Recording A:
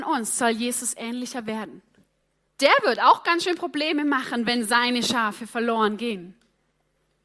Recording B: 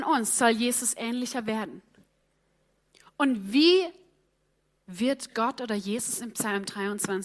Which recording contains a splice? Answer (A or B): A